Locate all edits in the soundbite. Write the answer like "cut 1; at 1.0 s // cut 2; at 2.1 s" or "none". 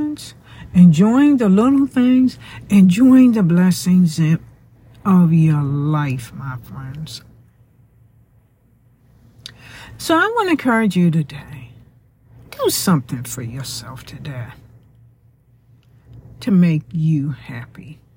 none